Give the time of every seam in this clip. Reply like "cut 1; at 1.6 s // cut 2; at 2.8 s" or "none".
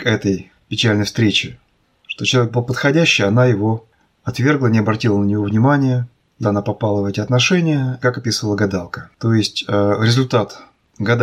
cut 1; at 6.4 s // cut 2; at 8.0 s